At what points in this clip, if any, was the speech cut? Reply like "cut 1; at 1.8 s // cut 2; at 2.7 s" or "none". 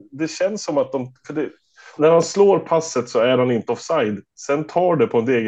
cut 1; at 2.0 s